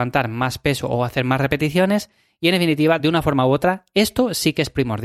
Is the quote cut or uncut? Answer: uncut